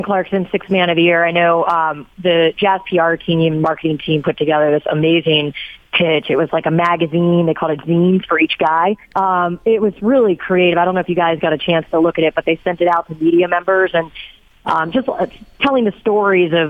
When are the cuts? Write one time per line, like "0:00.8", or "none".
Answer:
0:09.0